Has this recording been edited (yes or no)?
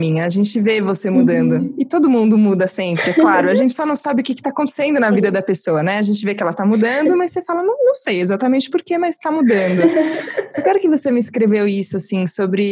no